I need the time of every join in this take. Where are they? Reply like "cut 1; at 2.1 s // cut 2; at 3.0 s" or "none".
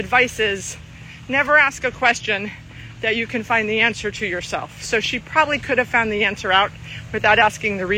none